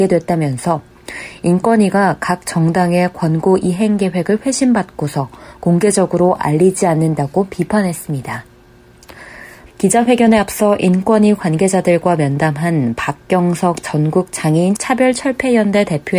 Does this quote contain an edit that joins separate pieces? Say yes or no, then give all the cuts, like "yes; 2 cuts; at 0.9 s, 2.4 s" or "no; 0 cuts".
yes; 1 cut; at 9.7 s